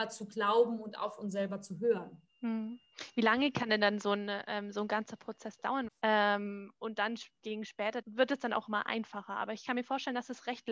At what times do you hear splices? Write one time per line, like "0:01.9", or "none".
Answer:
0:02.3
0:05.9
0:08.0